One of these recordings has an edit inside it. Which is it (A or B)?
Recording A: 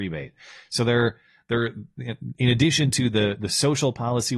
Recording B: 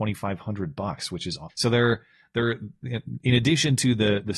B